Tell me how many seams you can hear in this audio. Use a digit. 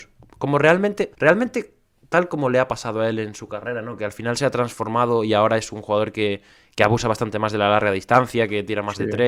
1